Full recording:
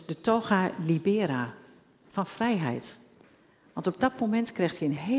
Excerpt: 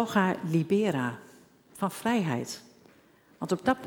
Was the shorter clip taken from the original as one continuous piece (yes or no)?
yes